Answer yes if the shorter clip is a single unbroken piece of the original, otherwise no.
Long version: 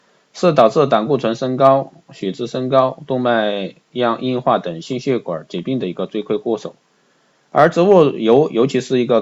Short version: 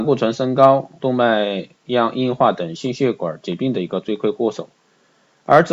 no